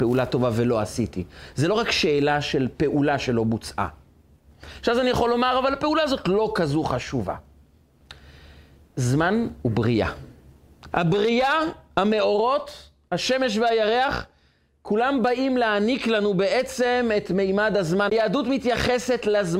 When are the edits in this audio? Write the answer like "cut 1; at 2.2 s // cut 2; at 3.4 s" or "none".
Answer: cut 1; at 10.9 s // cut 2; at 18.1 s